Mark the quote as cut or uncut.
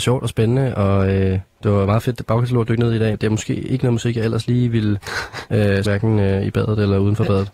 cut